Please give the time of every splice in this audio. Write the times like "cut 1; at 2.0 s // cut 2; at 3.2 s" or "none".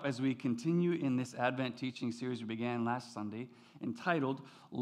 none